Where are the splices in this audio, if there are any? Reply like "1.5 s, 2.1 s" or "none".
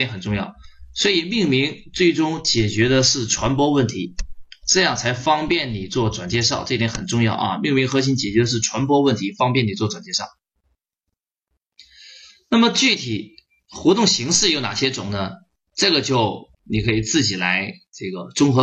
16.5 s